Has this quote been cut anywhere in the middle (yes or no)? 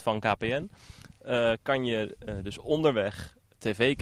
no